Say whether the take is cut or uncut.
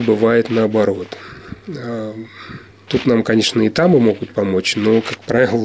cut